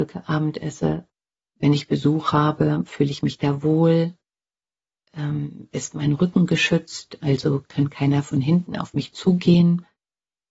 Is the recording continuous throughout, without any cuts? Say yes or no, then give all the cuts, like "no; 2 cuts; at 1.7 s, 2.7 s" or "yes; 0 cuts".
yes; 0 cuts